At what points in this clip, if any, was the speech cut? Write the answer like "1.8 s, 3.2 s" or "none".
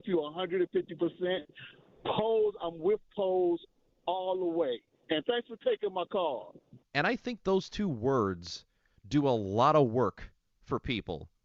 6.8 s